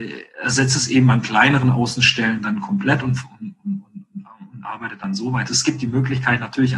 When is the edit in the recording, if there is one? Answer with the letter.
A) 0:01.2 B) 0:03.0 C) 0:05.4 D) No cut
C